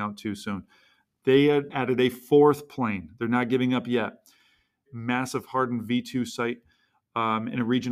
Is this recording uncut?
no; 2 cuts; at 1.7 s, 4.9 s

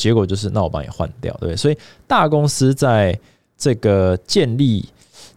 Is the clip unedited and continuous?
yes; 0 cuts

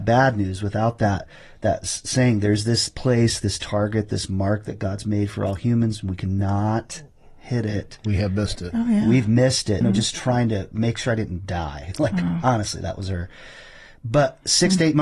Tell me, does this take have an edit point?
yes; 1 cut; at 9.8 s

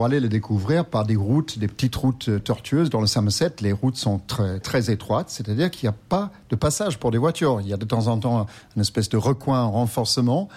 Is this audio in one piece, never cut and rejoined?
no; 1 cut; at 4.6 s

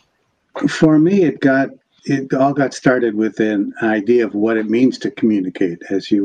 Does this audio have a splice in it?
yes; 1 cut; at 2.0 s

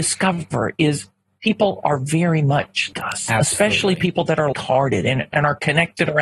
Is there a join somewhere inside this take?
yes; 2 cuts; at 2.9 s, 4.5 s

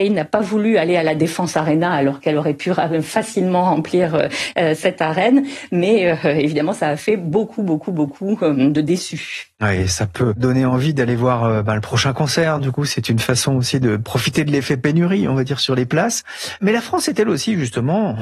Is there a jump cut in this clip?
no; 0 cuts

